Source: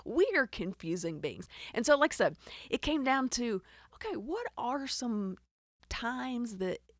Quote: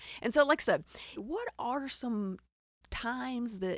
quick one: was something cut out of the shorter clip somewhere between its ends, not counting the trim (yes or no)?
yes